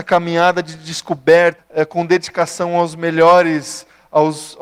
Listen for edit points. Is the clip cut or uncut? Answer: cut